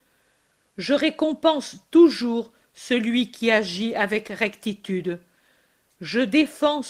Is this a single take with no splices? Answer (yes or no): yes